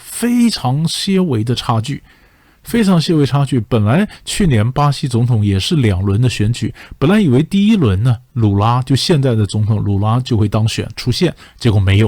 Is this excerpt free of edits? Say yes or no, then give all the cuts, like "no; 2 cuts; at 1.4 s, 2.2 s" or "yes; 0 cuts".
yes; 0 cuts